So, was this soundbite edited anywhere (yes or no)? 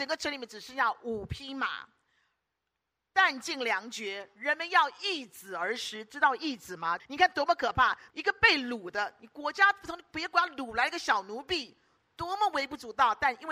yes